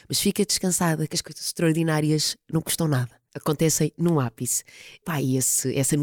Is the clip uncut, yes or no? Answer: yes